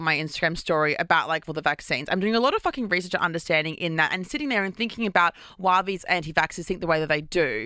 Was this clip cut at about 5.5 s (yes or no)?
no